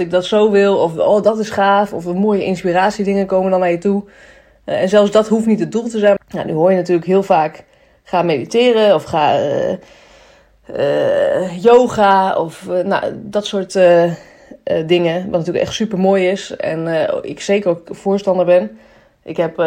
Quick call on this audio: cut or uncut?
cut